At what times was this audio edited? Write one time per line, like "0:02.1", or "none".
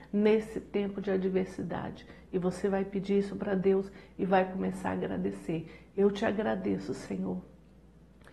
none